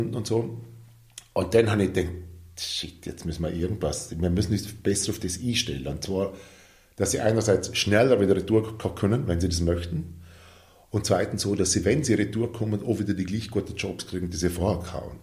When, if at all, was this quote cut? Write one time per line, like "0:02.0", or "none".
none